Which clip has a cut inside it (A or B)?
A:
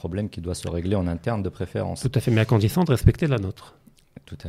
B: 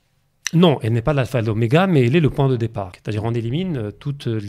B